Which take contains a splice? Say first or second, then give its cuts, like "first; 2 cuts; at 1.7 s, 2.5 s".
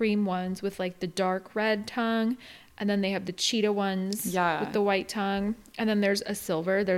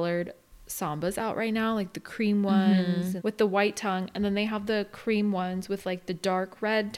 second; 1 cut; at 3.2 s